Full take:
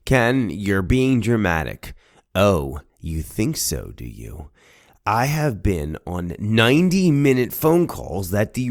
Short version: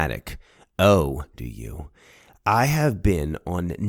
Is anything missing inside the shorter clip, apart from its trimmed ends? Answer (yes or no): yes